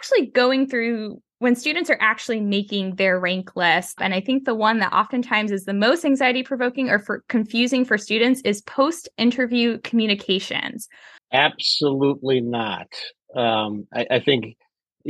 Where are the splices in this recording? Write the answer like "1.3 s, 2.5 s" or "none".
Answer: 4.0 s, 11.2 s